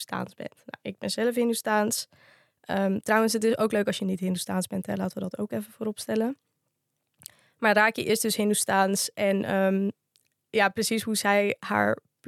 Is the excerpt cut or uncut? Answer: uncut